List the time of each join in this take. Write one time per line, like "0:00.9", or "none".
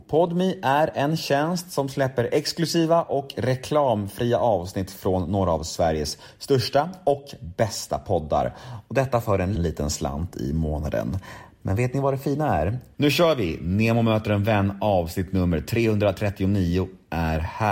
0:09.6
0:12.9